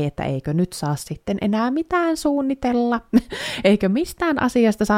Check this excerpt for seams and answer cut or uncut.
uncut